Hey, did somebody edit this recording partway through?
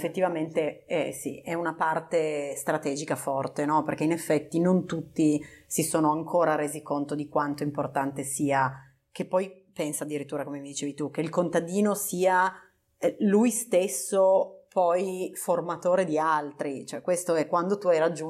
no; 0 cuts

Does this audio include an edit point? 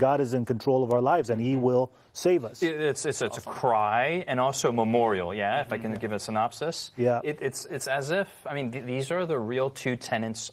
no; 0 cuts

